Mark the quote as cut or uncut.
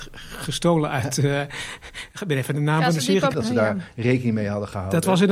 cut